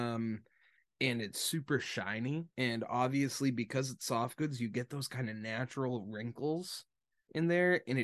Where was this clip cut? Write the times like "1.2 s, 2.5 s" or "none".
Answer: 2.5 s